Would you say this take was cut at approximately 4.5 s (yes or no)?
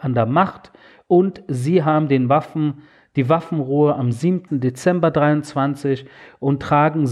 yes